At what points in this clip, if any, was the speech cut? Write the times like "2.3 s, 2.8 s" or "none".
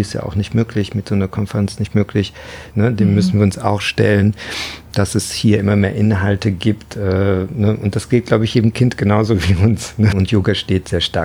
2.7 s, 10.1 s